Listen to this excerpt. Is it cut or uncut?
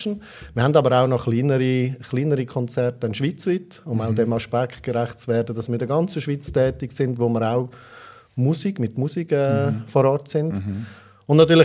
uncut